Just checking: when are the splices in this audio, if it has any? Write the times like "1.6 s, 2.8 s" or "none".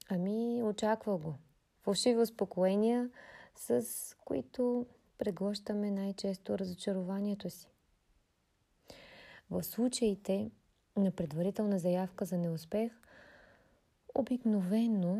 1.8 s